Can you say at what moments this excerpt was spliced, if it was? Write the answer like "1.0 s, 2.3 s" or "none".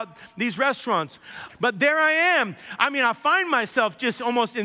1.5 s